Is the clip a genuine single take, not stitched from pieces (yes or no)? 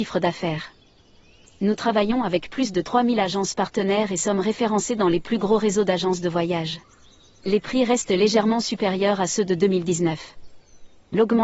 no